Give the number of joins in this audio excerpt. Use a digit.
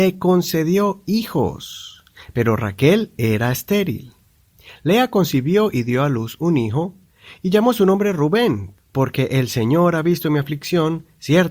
1